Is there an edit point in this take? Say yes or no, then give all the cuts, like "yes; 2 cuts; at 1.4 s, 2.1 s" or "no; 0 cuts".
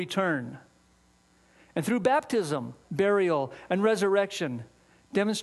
yes; 1 cut; at 2.8 s